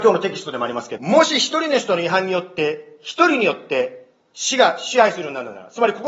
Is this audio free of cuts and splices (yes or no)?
no